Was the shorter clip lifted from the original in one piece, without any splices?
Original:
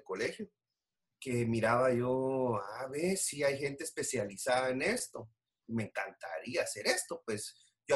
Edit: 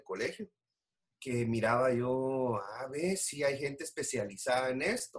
yes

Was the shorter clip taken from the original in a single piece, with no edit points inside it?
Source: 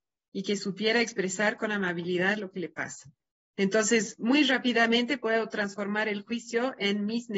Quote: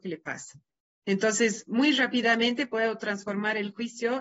yes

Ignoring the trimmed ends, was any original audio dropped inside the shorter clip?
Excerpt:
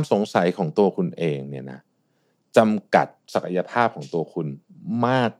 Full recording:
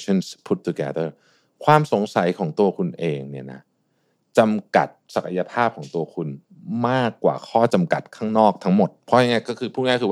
no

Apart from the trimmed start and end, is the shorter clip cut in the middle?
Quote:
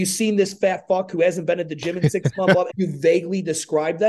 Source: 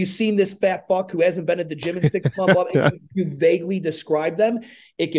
yes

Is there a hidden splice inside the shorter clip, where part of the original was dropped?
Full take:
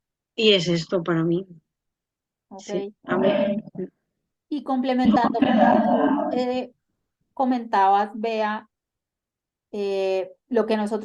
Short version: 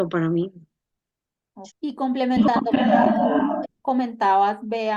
yes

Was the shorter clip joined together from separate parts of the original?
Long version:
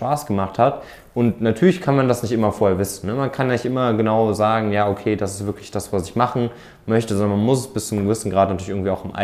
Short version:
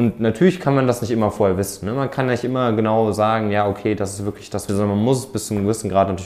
yes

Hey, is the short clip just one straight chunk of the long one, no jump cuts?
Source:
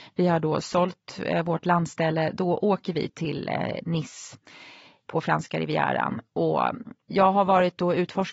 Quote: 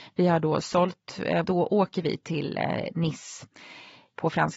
no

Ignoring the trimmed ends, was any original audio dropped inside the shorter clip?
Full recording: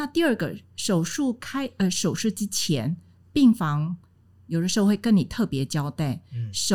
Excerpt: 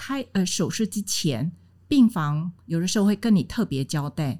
yes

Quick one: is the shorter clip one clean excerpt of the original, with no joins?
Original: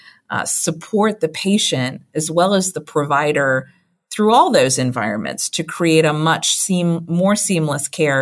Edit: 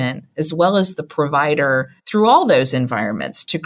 no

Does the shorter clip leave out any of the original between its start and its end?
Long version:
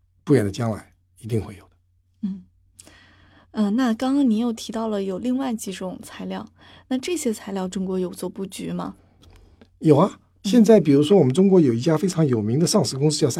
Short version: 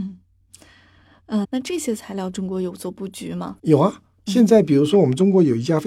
yes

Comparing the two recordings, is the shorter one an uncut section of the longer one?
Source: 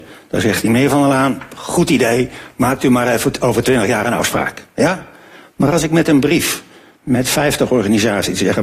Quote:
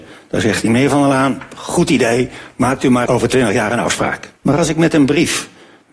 no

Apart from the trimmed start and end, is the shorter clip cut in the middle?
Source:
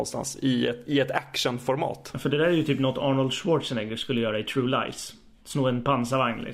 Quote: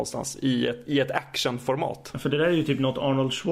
no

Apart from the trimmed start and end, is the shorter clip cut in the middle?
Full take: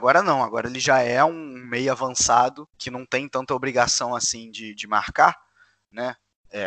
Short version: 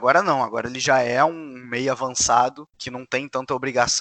no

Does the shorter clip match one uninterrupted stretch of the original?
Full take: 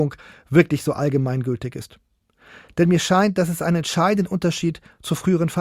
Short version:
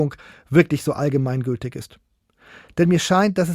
yes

